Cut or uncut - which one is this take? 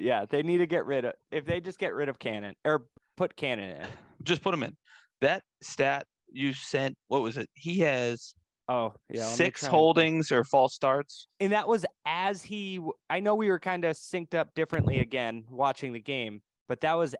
uncut